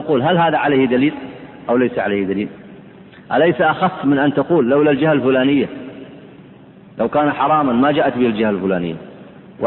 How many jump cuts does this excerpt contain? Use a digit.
0